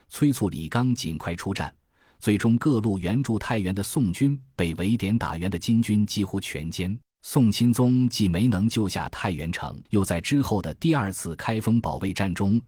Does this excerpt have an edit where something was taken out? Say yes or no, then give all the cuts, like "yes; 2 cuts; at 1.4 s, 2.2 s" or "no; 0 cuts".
yes; 2 cuts; at 7.1 s, 9.9 s